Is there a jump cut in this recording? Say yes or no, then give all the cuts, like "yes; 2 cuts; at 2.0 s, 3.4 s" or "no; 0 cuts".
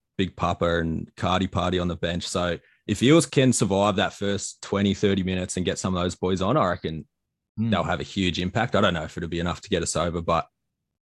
no; 0 cuts